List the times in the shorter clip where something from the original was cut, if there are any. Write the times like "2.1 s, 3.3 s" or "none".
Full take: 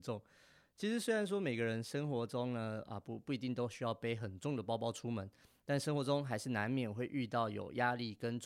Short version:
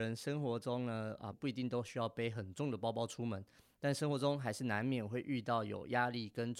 1.3 s